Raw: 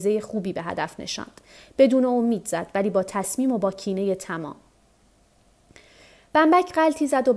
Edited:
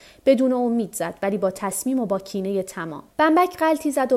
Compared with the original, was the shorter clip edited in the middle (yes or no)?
yes